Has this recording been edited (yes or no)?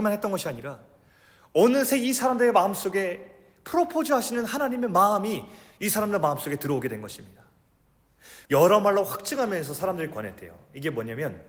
yes